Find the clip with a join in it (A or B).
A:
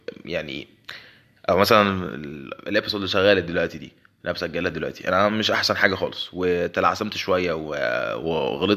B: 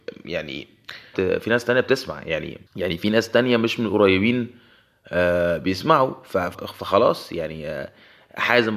B